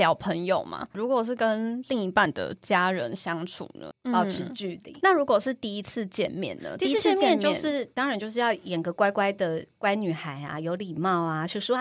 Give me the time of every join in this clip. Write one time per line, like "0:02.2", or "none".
0:03.9

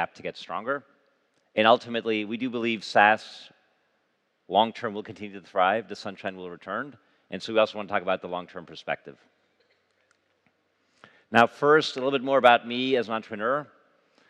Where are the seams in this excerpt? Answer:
none

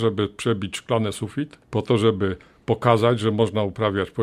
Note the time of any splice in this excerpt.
0:01.6

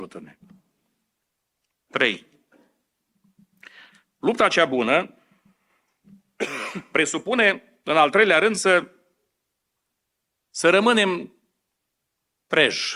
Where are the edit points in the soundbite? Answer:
none

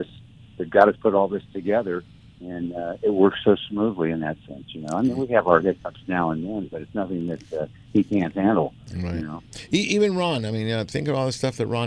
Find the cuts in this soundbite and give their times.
none

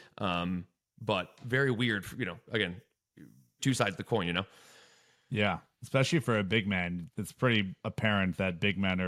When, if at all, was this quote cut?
0:03.6
0:07.1

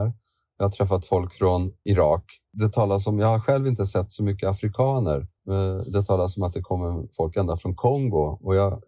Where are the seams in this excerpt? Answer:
none

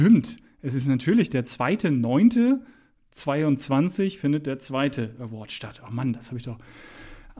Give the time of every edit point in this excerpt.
none

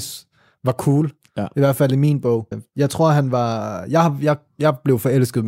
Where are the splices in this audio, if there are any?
0:02.5

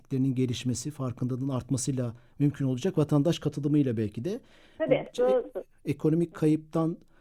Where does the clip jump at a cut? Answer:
0:05.1

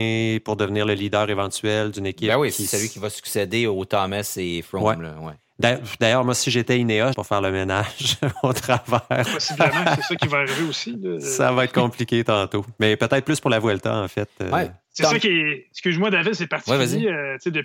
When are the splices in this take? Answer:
0:07.1
0:09.3

